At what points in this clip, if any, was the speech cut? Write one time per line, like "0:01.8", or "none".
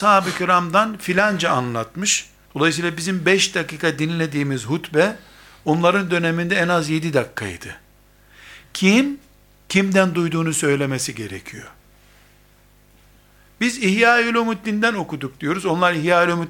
0:02.4